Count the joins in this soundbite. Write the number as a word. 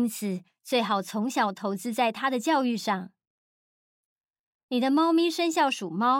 zero